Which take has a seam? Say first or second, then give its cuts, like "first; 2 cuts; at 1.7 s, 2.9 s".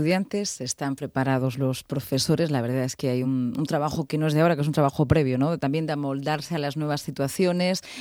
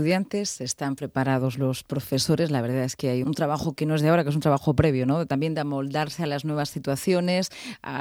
second; 1 cut; at 3.2 s